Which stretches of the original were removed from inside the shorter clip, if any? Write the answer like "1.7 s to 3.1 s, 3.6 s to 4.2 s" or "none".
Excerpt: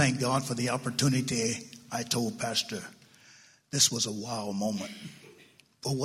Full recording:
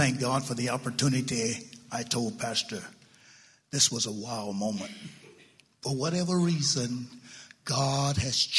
none